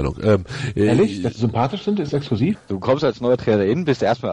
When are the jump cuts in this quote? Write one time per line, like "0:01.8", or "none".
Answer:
0:02.5